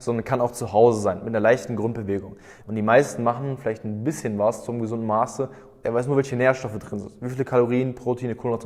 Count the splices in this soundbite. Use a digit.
2